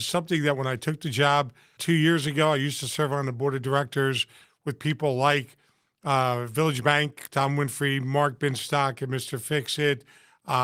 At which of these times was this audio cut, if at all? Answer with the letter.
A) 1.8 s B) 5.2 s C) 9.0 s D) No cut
A